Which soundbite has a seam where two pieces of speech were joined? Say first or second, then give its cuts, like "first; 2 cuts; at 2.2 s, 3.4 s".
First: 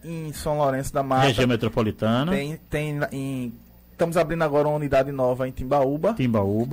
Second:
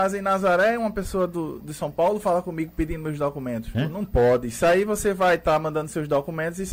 second; 1 cut; at 3.7 s